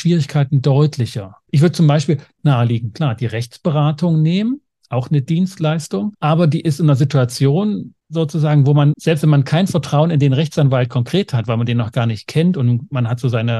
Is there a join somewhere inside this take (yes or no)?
no